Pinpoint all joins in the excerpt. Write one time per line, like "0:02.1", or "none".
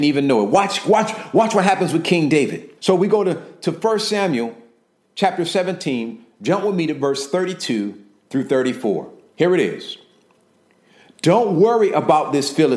0:02.8